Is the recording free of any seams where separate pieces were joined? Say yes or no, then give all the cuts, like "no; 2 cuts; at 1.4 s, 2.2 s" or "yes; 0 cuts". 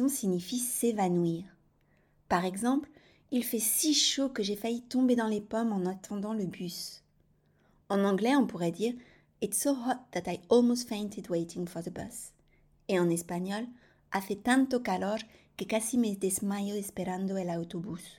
yes; 0 cuts